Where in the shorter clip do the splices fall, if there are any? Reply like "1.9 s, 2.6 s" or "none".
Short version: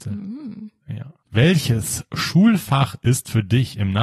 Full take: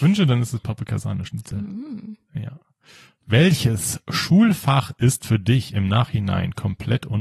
1.2 s